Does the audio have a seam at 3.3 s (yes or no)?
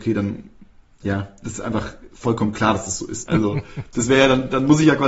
yes